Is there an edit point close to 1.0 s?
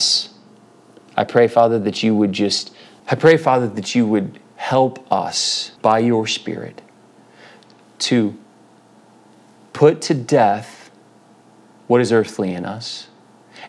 no; 2 cuts; at 3.0 s, 5.8 s

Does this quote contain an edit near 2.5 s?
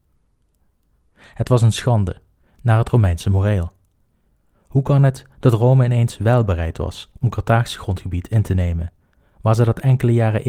yes; 1 cut; at 2.5 s

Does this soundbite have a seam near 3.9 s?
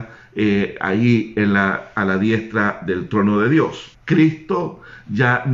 yes; 1 cut; at 3.9 s

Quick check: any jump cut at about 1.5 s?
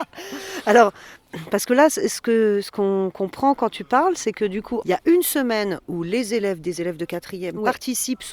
no; 1 cut; at 4.8 s

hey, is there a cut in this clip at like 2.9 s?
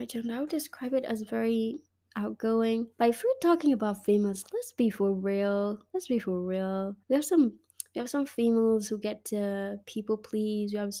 yes; 2 cuts; at 2.9 s, 7.0 s

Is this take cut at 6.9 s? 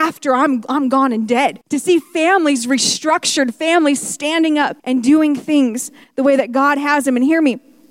no; 2 cuts; at 1.6 s, 4.8 s

